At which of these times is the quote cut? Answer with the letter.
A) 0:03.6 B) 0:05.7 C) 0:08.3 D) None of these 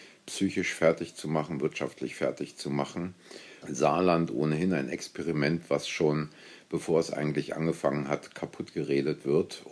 A